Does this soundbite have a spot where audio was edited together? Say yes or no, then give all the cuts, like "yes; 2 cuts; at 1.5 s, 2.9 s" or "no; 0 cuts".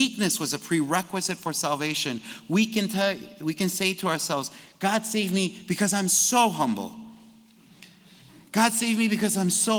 no; 0 cuts